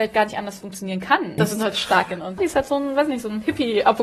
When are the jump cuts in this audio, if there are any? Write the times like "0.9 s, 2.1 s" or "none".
1.4 s, 2.4 s